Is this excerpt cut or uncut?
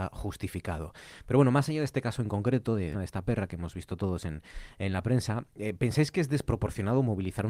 cut